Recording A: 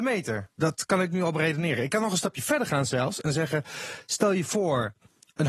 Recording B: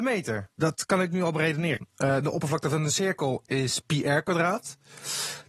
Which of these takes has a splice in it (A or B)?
B